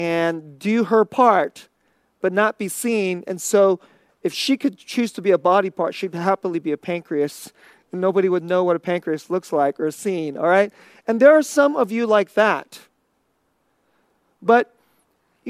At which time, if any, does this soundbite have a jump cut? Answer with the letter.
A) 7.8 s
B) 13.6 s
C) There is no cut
C